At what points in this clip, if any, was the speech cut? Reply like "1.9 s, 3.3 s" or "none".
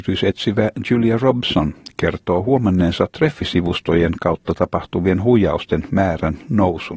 none